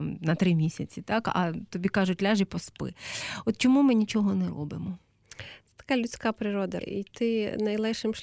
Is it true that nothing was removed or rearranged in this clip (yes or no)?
no